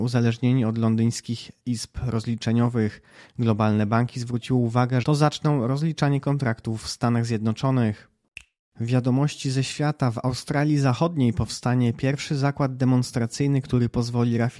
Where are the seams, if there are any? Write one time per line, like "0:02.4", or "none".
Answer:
0:05.0